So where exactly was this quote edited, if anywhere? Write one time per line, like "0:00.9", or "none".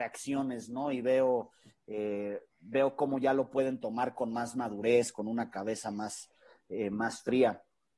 none